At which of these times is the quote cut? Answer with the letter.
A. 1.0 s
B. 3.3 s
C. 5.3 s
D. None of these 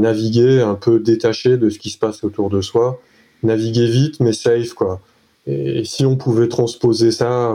C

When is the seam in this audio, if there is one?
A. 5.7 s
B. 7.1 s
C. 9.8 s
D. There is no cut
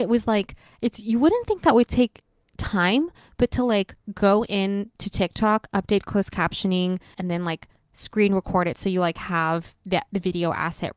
B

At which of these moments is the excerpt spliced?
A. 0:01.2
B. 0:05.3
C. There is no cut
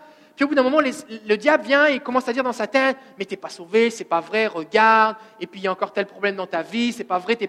C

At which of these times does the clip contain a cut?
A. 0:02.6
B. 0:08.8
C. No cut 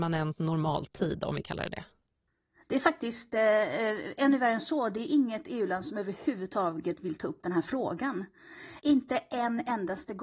B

